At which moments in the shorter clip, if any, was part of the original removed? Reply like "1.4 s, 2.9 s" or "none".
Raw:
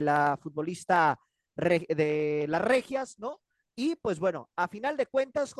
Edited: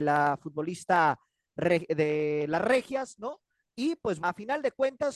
4.2 s